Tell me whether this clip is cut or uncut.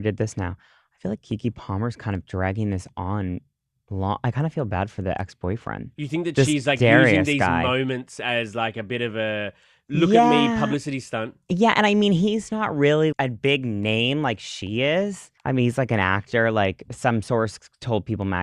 cut